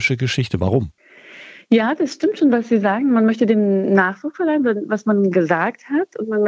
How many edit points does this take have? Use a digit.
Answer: 0